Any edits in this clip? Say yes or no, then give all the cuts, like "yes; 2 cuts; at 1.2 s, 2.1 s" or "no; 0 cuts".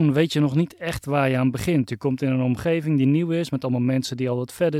no; 0 cuts